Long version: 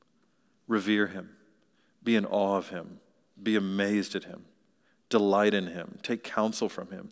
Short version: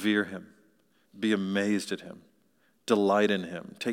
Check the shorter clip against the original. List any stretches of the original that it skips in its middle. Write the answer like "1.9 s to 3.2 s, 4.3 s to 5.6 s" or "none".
1.9 s to 3.3 s